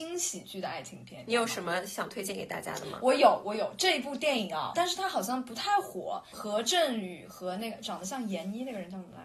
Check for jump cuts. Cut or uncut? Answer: cut